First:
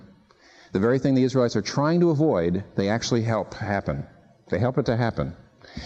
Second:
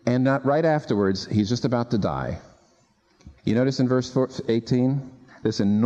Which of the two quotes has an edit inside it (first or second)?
second